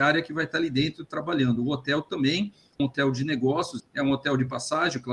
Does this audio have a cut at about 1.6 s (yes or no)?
no